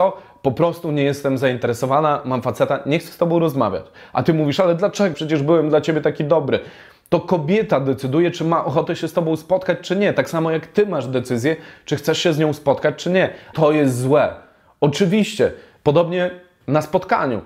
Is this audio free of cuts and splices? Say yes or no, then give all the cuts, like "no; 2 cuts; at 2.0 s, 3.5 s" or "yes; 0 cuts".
no; 3 cuts; at 5.1 s, 13.5 s, 15.8 s